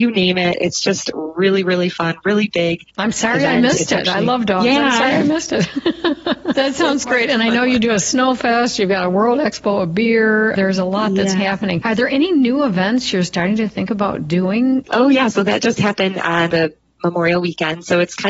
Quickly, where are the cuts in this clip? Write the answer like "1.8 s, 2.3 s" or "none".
14.8 s